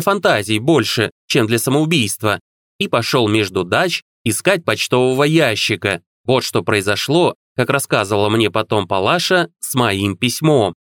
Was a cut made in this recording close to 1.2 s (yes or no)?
no